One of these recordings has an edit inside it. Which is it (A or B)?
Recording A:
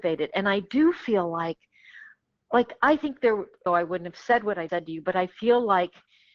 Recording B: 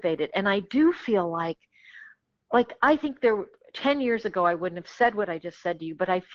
A